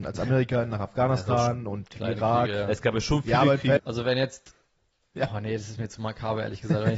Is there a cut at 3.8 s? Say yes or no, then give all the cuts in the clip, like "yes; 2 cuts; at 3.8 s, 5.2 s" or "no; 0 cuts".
yes; 1 cut; at 3.8 s